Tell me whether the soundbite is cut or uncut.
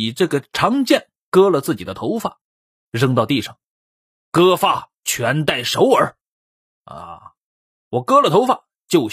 uncut